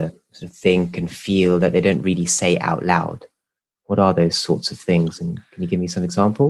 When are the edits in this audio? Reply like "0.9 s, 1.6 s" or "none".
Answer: none